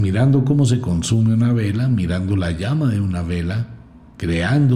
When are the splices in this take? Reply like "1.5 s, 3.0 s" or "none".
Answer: none